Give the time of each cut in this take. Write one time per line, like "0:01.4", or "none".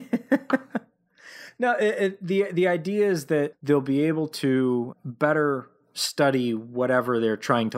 0:03.5